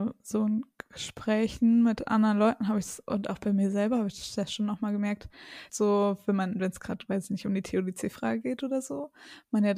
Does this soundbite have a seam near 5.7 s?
yes; 1 cut; at 5.7 s

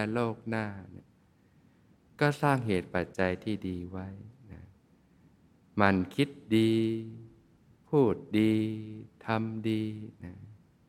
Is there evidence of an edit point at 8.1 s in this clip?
no; 0 cuts

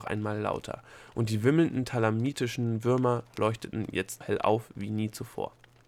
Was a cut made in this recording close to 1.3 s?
no; 1 cut; at 4.2 s

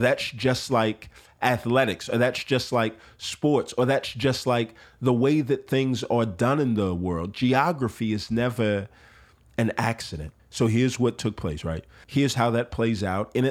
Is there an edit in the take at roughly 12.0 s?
yes; 2 cuts; at 10.4 s, 12.0 s

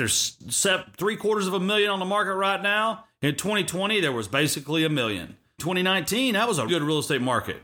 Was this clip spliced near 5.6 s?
yes; 2 cuts; at 5.6 s, 6.7 s

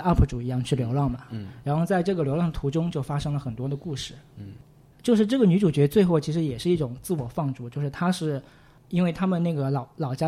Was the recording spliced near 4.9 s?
yes; 1 cut; at 4.9 s

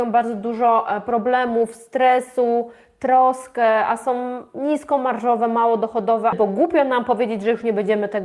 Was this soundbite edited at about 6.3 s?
yes; 1 cut; at 6.3 s

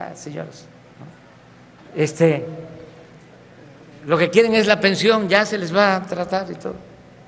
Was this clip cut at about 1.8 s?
yes; 1 cut; at 1.8 s

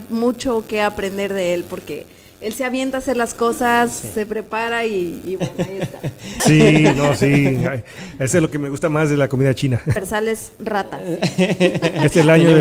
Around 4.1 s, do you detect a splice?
no; 2 cuts; at 6.4 s, 10.0 s

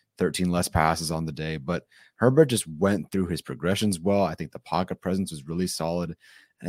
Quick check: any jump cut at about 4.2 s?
no; 0 cuts

